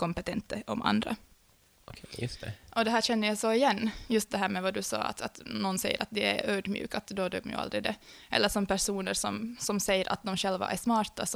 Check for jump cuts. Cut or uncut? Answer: uncut